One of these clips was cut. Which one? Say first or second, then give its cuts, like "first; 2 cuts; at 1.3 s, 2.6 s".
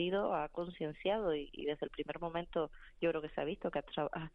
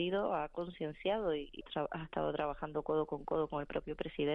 second; 1 cut; at 1.6 s